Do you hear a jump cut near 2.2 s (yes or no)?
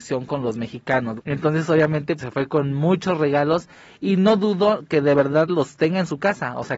yes